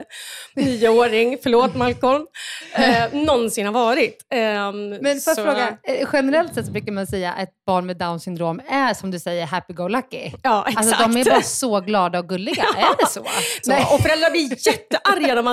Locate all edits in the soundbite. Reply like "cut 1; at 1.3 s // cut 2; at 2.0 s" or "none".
cut 1; at 13.6 s